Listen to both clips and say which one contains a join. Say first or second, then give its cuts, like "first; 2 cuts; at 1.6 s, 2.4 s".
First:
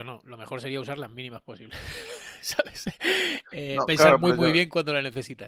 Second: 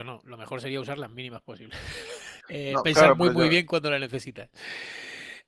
second; 1 cut; at 2.4 s